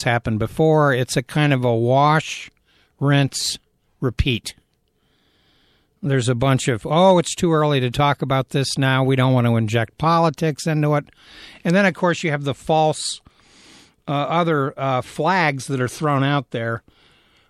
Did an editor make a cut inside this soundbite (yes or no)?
no